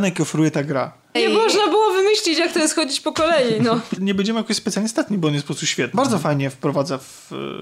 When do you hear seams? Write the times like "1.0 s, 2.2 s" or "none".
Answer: 1.2 s, 4.0 s, 5.9 s